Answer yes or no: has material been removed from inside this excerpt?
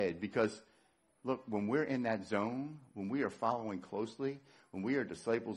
no